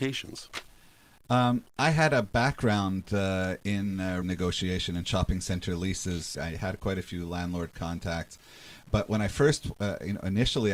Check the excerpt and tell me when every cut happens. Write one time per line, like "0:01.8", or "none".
0:04.2
0:06.3